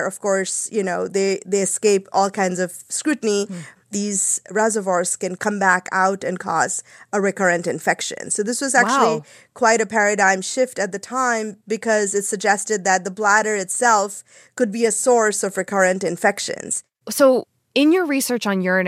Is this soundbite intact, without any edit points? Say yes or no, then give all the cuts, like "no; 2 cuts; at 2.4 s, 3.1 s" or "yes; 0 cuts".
no; 1 cut; at 3.8 s